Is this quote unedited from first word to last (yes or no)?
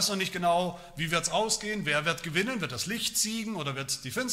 yes